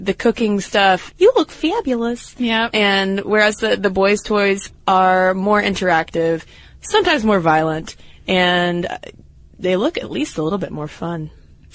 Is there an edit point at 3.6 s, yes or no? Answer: no